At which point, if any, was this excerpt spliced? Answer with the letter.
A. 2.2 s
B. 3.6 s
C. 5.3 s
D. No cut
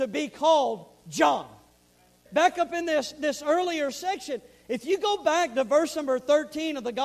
A